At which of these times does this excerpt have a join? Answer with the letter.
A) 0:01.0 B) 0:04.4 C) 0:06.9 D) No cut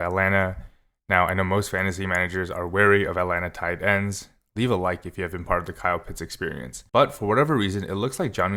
C